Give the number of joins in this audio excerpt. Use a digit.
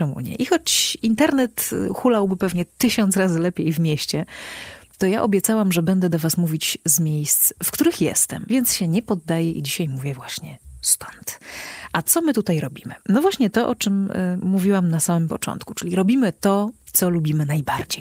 0